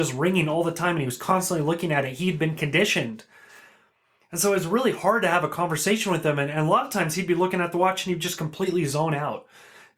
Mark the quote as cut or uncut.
uncut